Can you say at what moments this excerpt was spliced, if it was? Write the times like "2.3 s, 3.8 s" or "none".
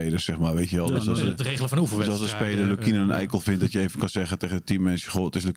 none